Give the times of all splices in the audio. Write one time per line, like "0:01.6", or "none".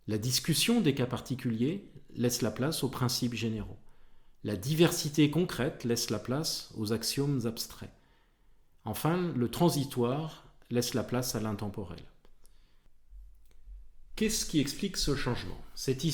none